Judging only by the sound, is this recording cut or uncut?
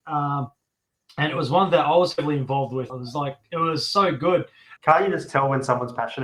cut